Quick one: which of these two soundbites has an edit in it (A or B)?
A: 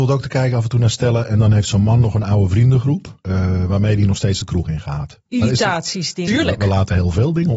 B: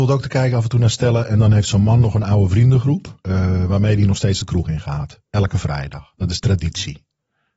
A